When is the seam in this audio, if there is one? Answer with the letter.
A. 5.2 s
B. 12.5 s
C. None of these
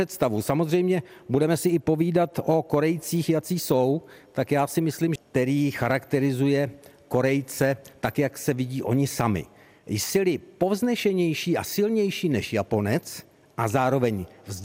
A